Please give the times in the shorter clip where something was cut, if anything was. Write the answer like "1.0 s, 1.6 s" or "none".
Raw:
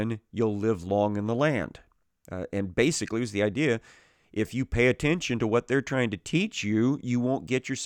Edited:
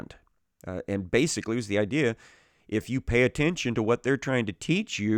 none